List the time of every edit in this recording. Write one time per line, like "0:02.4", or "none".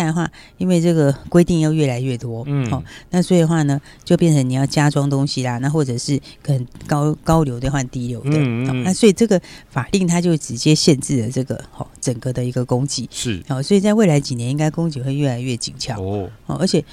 none

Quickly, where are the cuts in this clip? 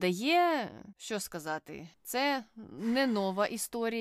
0:00.9

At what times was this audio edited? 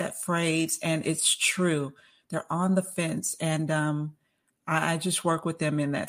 none

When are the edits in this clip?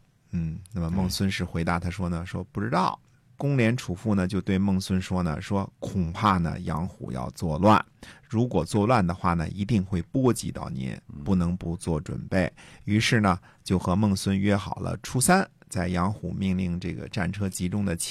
0:03.3

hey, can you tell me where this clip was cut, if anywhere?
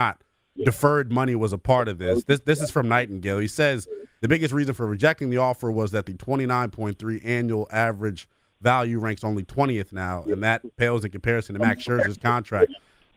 0:04.2

